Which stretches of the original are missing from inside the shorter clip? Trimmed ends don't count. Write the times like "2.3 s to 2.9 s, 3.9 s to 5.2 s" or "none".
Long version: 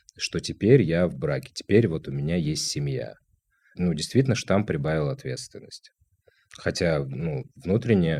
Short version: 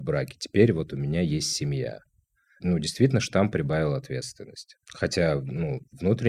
6.0 s to 6.5 s